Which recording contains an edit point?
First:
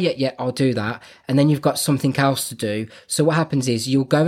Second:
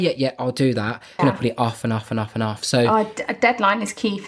second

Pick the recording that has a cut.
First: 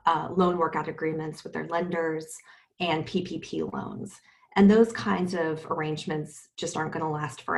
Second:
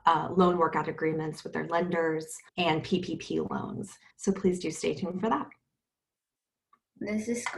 second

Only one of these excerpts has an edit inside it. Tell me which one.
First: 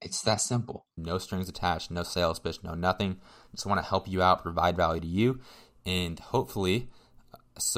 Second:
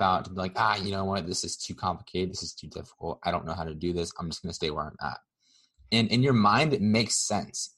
first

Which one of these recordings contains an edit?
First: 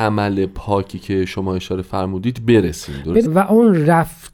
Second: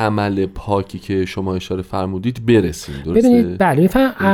first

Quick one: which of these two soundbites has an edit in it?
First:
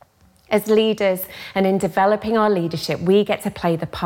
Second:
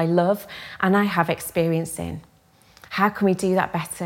second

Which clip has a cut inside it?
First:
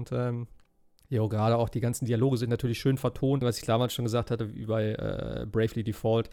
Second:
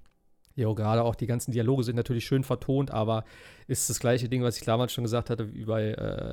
first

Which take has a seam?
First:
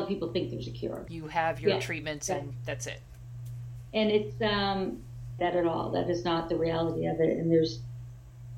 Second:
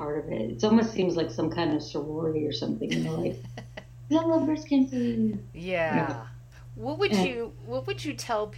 first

